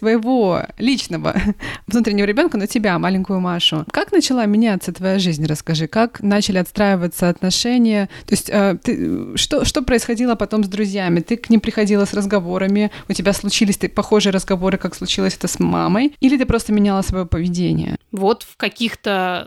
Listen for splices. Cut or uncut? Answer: cut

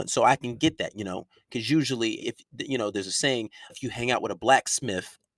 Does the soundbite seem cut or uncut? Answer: cut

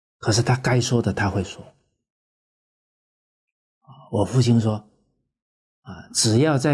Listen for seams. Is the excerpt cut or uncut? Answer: uncut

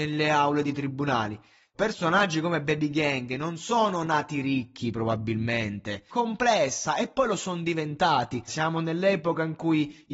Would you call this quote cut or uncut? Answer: cut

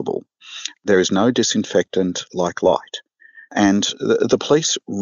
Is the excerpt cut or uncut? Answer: uncut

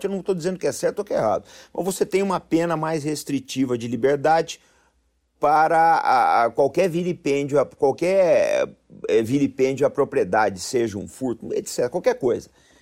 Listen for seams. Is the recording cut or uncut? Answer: uncut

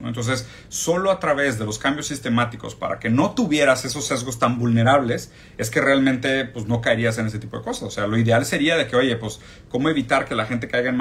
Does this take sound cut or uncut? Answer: uncut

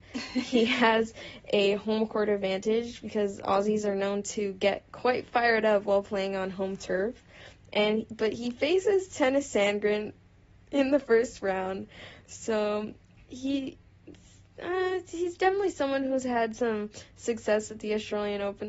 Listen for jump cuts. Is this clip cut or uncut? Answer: uncut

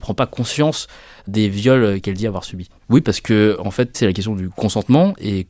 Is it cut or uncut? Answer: cut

